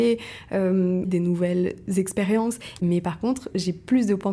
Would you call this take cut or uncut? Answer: cut